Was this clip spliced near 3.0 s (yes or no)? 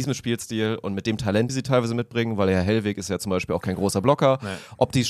no